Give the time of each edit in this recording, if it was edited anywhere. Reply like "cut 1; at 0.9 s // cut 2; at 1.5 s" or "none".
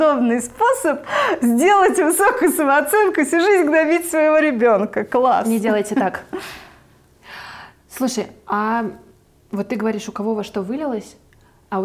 none